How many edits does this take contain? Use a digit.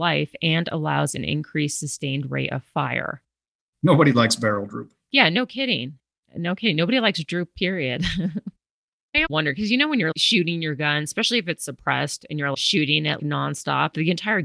2